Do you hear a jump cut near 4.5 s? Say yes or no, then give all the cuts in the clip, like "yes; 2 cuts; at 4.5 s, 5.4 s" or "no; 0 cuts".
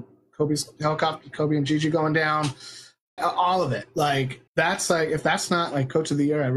yes; 2 cuts; at 3.2 s, 4.5 s